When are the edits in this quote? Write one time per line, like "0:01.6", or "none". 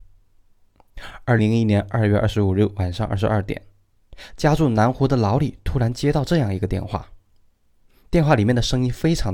0:01.4